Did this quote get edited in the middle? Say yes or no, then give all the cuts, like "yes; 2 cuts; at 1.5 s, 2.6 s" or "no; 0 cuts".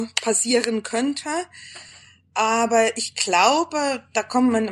no; 0 cuts